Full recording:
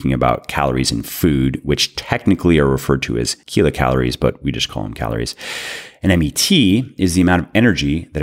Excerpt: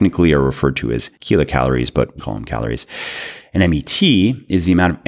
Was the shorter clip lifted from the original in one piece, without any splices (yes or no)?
no